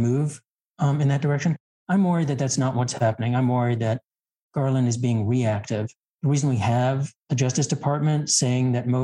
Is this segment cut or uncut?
cut